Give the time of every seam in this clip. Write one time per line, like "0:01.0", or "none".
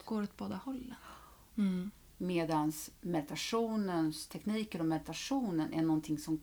0:01.5